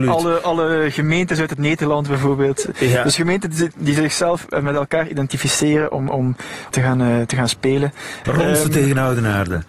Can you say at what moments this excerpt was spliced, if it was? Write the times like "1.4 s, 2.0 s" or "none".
6.7 s, 8.2 s